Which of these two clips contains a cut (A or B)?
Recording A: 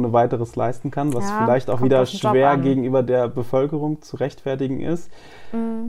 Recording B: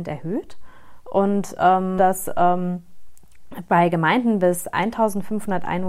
B